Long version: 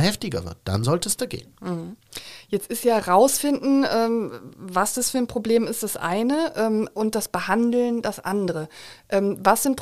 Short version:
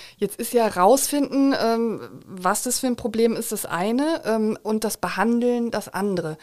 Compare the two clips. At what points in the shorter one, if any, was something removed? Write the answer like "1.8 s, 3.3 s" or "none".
none